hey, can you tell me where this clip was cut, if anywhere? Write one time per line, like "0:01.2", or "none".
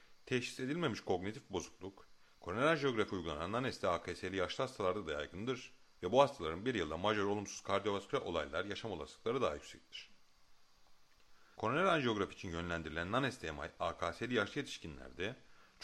0:11.6